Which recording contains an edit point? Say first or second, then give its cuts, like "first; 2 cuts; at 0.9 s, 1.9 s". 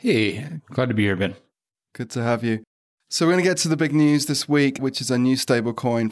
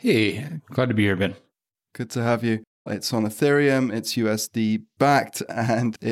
second; 1 cut; at 2.9 s